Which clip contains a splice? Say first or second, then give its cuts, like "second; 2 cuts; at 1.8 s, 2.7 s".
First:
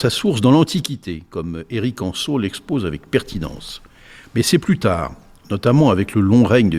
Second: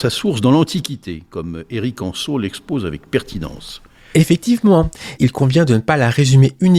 second; 2 cuts; at 4.1 s, 5.2 s